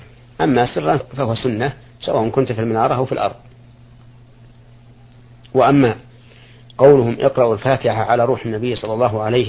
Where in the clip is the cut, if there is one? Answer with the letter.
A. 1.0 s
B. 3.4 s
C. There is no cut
A